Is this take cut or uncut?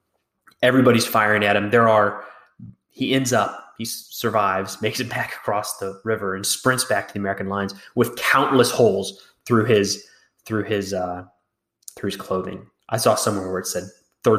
uncut